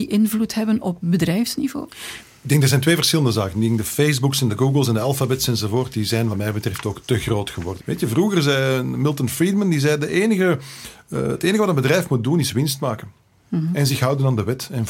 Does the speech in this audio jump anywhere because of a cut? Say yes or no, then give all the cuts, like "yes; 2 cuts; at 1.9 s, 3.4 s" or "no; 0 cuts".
yes; 1 cut; at 7.8 s